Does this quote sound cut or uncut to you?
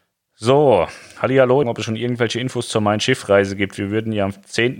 cut